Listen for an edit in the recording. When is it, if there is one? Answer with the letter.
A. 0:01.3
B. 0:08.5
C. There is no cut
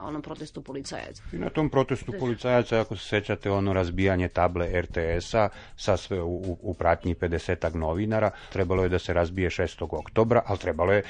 B